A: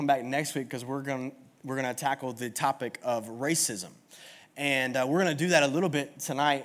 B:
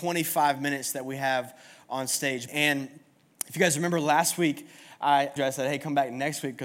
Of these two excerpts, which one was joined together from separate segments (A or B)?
B